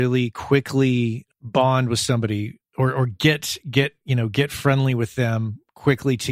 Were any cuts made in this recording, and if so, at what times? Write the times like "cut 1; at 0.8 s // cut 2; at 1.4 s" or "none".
cut 1; at 2.6 s